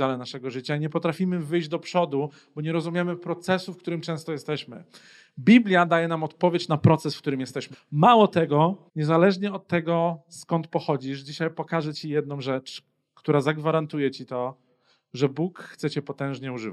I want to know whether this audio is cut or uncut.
cut